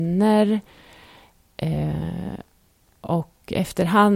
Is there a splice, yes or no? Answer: no